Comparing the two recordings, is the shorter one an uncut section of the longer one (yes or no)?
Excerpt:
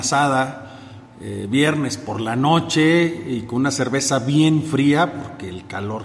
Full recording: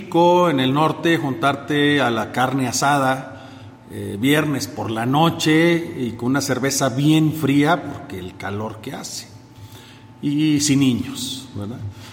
yes